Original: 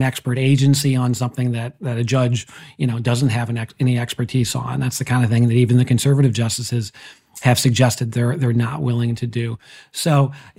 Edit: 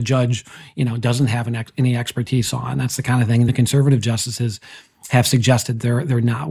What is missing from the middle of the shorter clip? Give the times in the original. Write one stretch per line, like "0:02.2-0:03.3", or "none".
0:05.5-0:05.8